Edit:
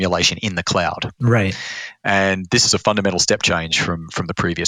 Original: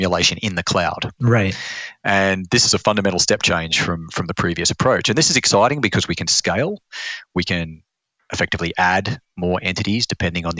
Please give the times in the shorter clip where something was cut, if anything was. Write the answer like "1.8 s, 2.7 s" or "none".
none